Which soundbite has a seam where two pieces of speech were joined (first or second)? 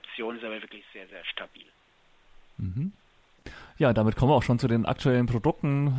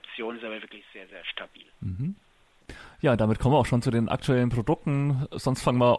second